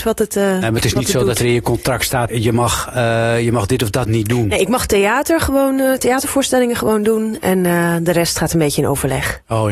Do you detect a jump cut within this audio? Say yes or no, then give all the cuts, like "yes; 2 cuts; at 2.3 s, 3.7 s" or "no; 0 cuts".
yes; 1 cut; at 2.3 s